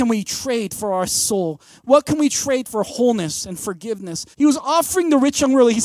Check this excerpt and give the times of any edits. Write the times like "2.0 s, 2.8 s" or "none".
4.3 s